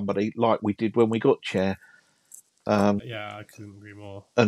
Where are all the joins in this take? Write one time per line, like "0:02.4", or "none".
0:03.0